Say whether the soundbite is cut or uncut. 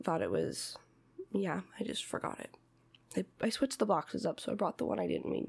uncut